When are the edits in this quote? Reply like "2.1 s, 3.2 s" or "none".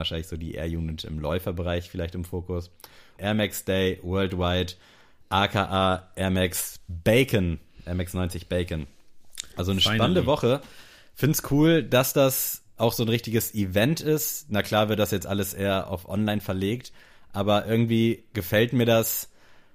3.2 s